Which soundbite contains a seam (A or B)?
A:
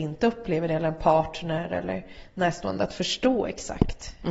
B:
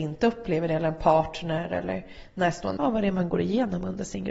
B